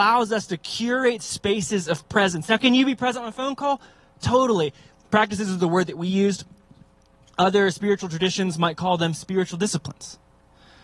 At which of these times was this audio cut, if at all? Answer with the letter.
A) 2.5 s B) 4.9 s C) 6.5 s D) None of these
B